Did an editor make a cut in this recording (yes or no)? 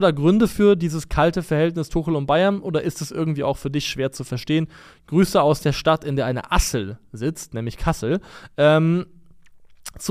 no